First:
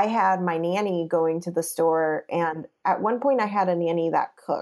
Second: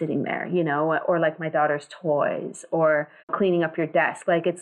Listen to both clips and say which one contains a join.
second; 1 cut; at 3.2 s

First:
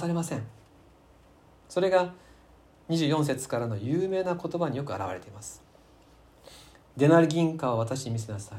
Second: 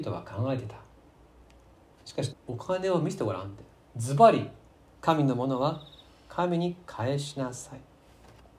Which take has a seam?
second; 2 cuts; at 2.3 s, 4.8 s

